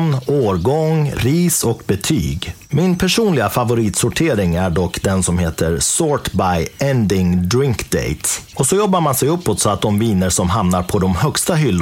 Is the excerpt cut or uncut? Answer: cut